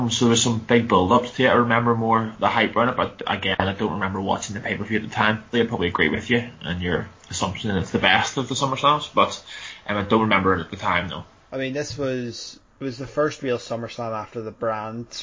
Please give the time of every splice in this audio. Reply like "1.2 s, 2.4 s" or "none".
5.5 s